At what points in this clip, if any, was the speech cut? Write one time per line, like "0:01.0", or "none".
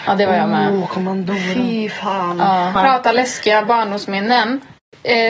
0:02.8